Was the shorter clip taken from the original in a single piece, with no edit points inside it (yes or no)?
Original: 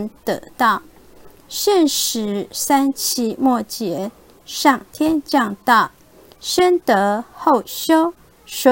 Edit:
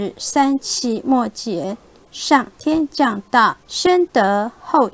no